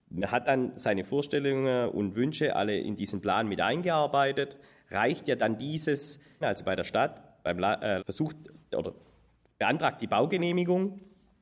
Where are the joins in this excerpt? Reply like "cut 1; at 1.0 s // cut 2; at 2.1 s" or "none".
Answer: cut 1; at 6.4 s // cut 2; at 8.0 s

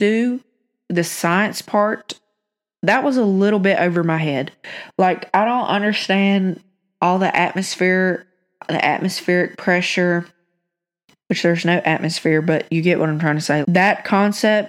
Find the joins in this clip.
cut 1; at 13.6 s

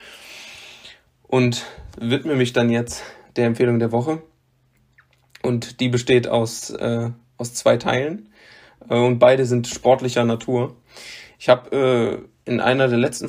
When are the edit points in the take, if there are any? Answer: none

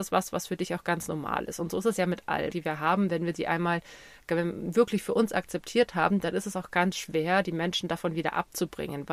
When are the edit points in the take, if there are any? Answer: cut 1; at 2.5 s

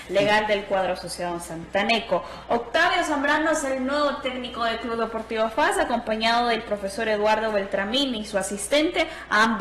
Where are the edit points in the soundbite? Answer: none

